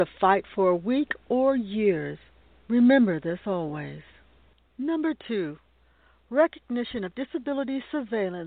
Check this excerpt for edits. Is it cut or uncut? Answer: uncut